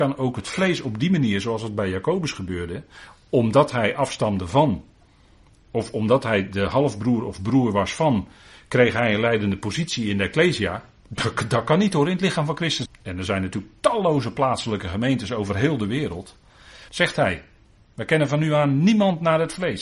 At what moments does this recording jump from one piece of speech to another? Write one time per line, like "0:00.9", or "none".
0:12.9
0:16.9